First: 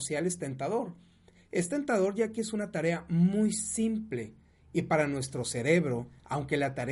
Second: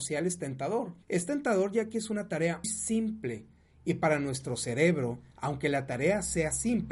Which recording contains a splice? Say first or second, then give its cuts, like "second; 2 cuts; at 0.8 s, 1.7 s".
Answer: second; 2 cuts; at 1.0 s, 2.6 s